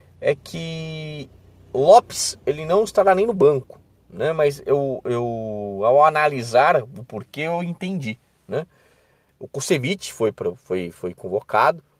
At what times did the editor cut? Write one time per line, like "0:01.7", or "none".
none

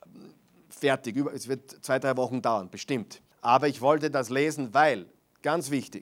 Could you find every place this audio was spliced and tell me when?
0:03.3

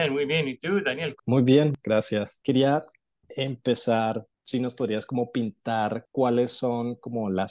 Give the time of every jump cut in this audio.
0:01.2

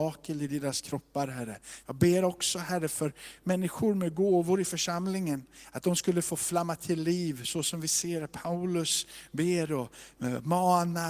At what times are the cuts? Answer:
0:01.8

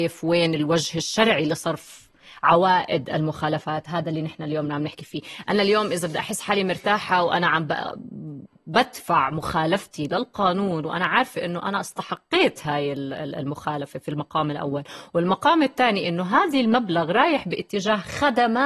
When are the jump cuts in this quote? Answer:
none

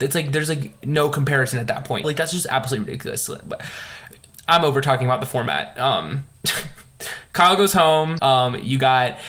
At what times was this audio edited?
0:02.0
0:08.2

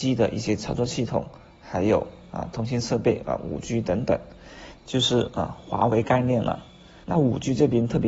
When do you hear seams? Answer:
0:04.8
0:07.0

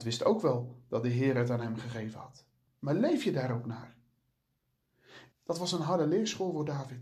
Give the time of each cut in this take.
0:02.7
0:05.3

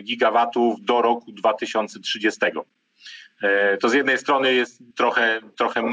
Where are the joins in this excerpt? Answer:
0:04.9

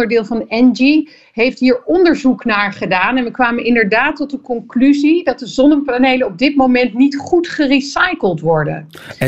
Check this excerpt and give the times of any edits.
none

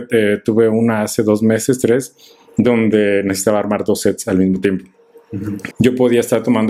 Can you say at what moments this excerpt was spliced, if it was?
0:05.7

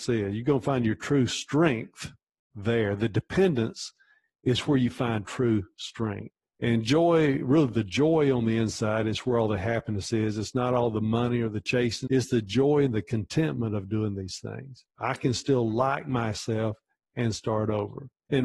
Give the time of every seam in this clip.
0:12.1
0:14.9

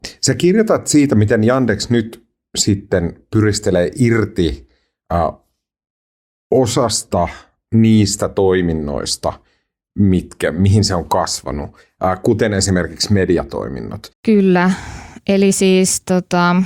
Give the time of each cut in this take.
0:14.1

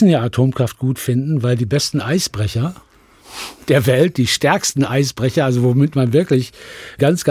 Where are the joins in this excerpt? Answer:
none

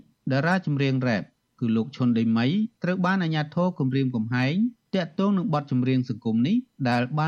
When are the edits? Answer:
none

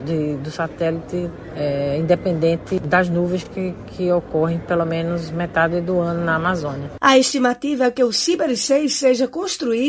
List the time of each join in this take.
none

